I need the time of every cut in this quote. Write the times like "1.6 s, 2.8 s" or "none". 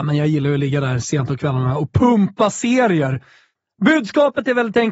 none